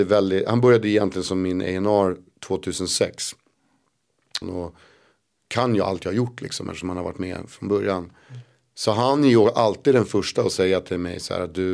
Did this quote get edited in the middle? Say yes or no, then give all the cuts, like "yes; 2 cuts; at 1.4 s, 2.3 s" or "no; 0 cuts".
yes; 1 cut; at 4.4 s